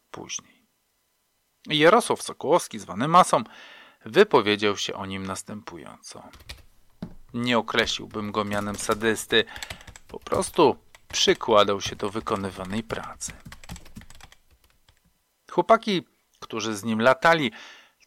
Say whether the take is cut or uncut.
uncut